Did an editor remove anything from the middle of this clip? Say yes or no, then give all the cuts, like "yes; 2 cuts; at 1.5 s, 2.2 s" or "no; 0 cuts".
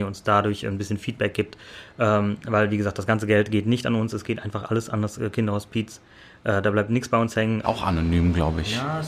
yes; 1 cut; at 7.6 s